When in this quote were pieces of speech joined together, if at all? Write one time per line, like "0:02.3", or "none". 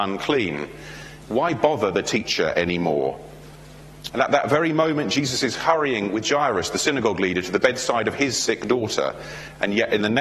0:01.2
0:04.1